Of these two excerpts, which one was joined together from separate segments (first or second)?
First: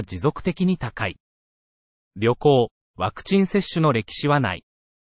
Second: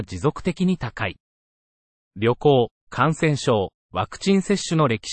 first